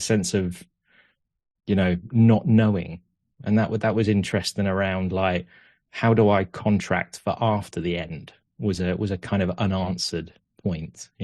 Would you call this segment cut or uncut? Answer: uncut